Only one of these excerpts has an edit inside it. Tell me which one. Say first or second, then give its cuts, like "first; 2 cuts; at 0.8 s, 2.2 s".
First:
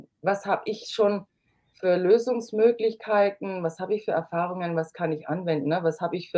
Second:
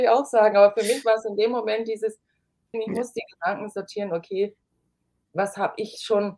second; 2 cuts; at 2.7 s, 5.2 s